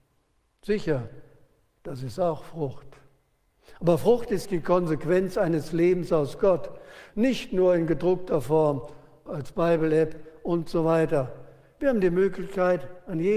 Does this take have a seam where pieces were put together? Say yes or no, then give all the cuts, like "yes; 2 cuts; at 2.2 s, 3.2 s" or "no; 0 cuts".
yes; 3 cuts; at 4.4 s, 7.1 s, 9.3 s